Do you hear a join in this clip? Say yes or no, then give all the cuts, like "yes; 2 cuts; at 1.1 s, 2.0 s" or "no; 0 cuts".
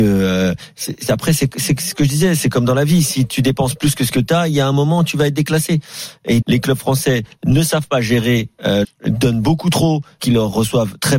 yes; 3 cuts; at 6.4 s, 8.8 s, 10.2 s